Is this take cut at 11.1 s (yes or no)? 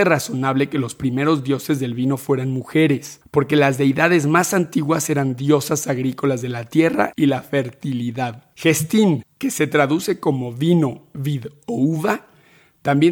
no